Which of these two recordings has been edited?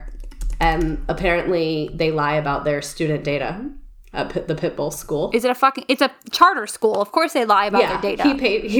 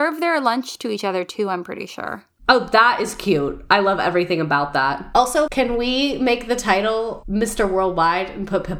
second; 1 cut; at 5.5 s

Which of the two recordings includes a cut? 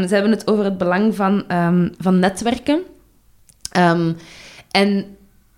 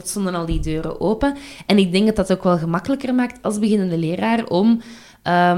first; 1 cut; at 1.9 s

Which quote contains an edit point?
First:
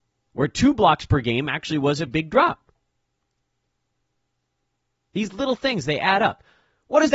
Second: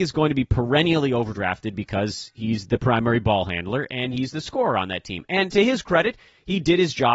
first; 1 cut; at 2.1 s

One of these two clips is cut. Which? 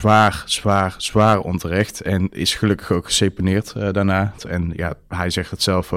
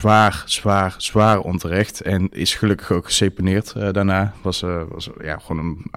first; 1 cut; at 4.4 s

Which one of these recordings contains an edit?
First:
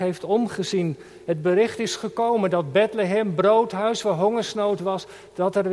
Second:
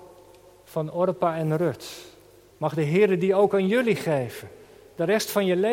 second; 1 cut; at 2.5 s

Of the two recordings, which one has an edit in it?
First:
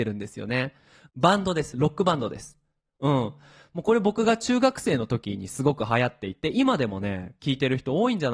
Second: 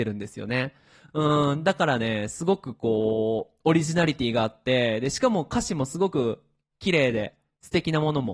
first; 1 cut; at 1.1 s

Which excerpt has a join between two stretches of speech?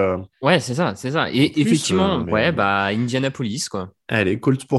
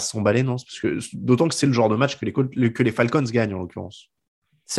first; 1 cut; at 2.2 s

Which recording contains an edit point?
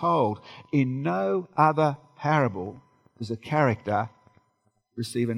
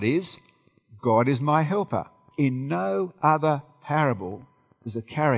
second; 1 cut; at 2.3 s

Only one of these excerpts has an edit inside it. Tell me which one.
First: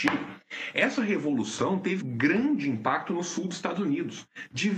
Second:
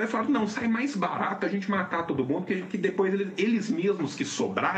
first; 1 cut; at 2.0 s

